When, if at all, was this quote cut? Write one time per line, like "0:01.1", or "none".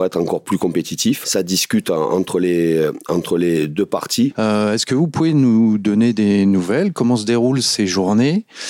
0:01.2
0:04.3